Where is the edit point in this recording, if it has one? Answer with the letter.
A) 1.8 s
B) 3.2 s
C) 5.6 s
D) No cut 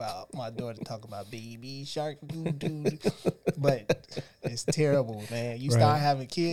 D